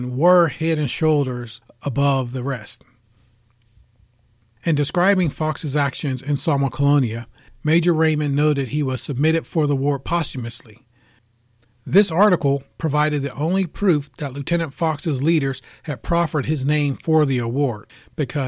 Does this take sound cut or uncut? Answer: uncut